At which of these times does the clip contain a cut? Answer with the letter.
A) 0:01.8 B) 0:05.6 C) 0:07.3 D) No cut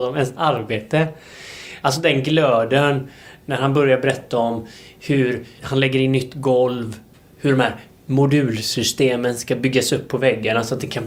B